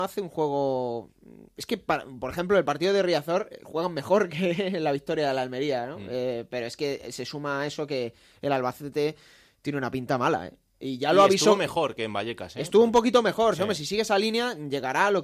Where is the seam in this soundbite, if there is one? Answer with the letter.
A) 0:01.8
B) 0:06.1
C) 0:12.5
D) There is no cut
D